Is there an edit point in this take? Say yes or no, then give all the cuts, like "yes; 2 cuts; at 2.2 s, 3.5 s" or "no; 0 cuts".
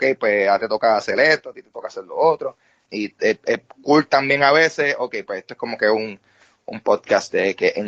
yes; 1 cut; at 2.9 s